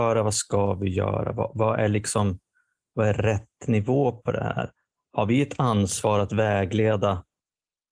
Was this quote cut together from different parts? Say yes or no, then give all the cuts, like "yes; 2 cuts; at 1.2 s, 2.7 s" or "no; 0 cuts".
no; 0 cuts